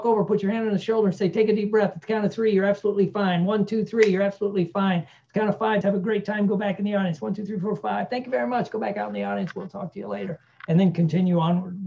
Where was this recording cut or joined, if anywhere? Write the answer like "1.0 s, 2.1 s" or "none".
5.8 s

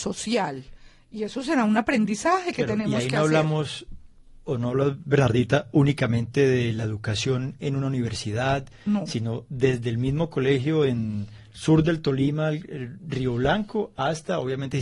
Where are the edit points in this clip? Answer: none

